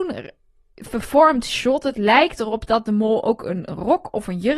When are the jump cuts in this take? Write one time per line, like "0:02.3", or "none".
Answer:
none